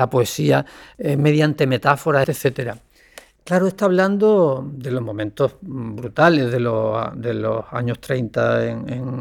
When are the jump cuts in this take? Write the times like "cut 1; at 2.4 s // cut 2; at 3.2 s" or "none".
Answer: cut 1; at 2.2 s